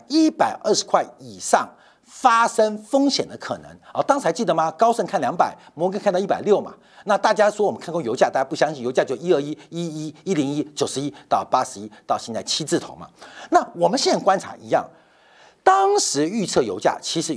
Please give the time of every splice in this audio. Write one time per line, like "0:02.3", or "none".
none